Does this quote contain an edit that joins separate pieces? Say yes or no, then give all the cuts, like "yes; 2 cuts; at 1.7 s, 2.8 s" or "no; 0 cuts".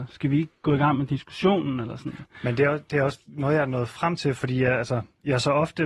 no; 0 cuts